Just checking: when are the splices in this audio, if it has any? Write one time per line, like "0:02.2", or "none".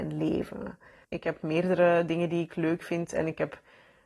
0:01.1